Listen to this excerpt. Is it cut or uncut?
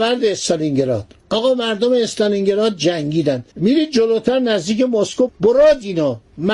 cut